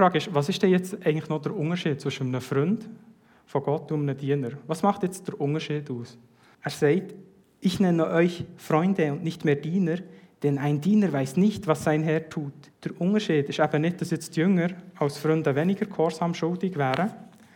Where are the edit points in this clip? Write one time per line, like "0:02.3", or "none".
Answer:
0:06.5
0:12.7